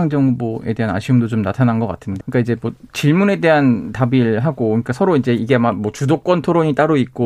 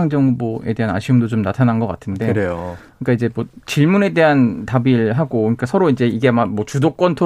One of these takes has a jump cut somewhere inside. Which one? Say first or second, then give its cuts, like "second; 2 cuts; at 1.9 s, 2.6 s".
first; 1 cut; at 2.2 s